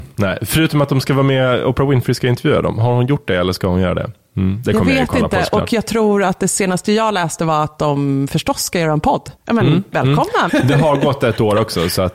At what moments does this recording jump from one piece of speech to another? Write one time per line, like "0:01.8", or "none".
0:09.4
0:10.5